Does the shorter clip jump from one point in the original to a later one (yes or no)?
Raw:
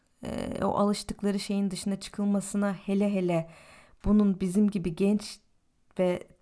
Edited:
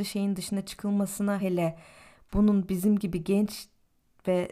yes